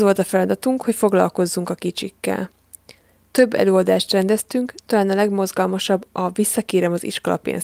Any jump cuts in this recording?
no; 0 cuts

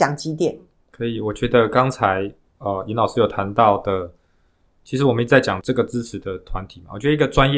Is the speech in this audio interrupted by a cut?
no; 0 cuts

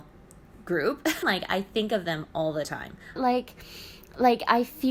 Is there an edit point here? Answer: yes; 2 cuts; at 1.2 s, 3.2 s

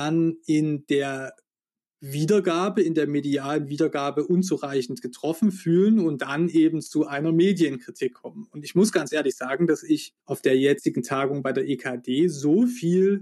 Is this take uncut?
no; 1 cut; at 10.2 s

